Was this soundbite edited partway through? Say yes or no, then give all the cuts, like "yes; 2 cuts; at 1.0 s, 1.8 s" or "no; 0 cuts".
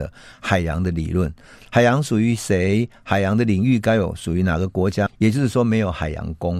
yes; 1 cut; at 5.1 s